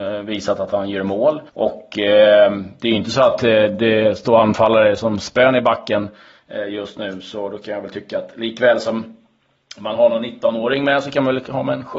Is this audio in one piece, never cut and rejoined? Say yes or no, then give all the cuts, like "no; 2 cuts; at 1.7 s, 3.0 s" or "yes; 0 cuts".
no; 1 cut; at 1.5 s